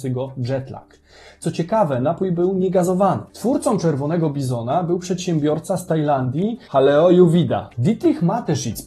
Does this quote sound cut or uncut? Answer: cut